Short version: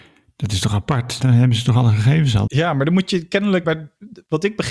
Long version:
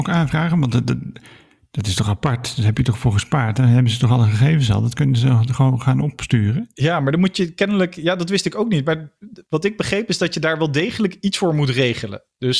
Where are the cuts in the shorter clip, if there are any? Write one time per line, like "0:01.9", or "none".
0:01.2
0:02.5
0:03.6

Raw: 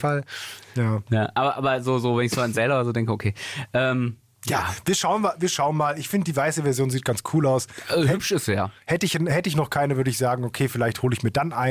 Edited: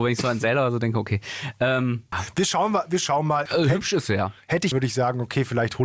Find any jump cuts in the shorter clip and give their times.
0:02.1
0:03.5
0:04.7

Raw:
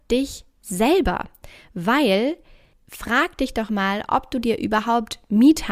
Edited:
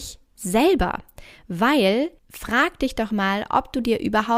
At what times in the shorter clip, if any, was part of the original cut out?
0:02.2

